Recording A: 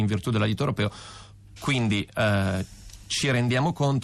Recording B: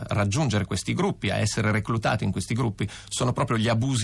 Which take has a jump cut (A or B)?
A